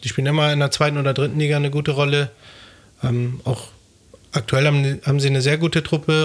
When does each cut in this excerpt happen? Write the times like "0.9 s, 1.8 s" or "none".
none

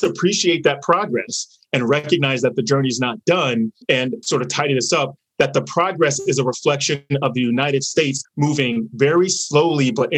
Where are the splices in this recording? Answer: 3.8 s, 8.2 s

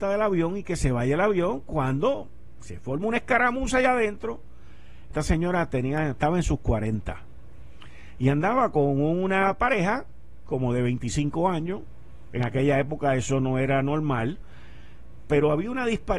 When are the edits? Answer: 5.1 s

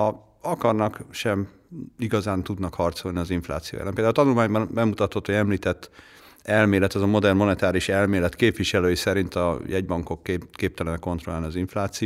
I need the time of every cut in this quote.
none

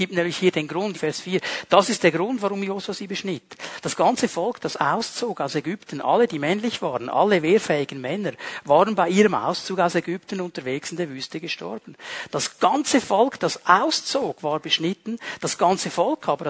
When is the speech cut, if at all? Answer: 0.9 s

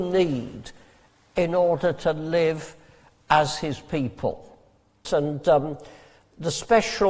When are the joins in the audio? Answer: 5.0 s

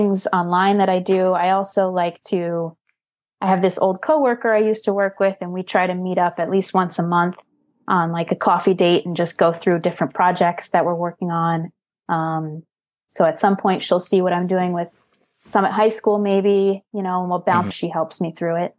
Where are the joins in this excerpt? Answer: 17.7 s

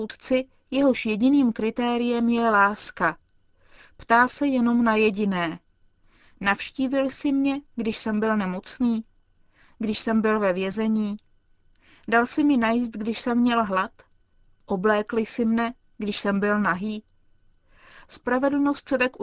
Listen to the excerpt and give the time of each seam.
none

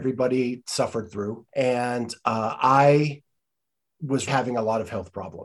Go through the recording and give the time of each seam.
1.5 s, 4.3 s

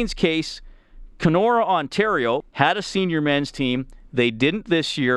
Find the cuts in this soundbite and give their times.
2.4 s

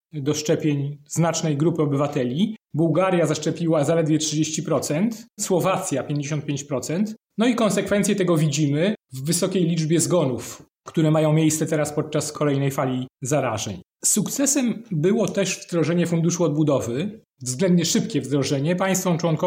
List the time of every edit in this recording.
5.4 s

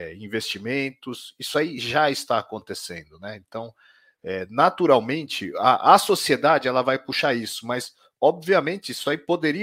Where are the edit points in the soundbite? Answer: none

